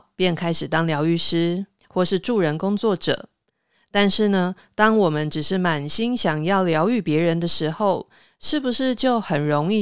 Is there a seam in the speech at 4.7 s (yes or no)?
no